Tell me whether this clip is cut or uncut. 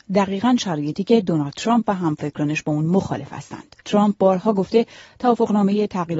cut